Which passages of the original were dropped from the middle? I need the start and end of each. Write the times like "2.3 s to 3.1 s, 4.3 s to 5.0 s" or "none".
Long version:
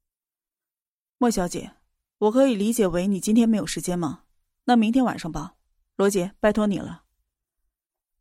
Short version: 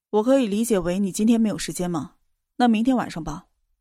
none